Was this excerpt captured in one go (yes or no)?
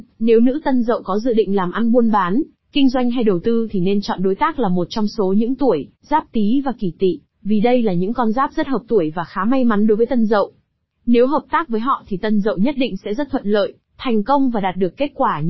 no